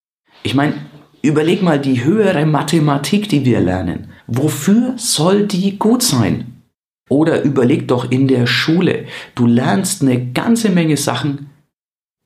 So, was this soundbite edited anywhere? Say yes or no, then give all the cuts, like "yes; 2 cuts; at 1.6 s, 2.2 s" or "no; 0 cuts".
yes; 2 cuts; at 4.2 s, 7.1 s